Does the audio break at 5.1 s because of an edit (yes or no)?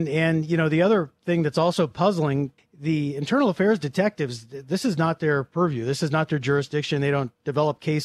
no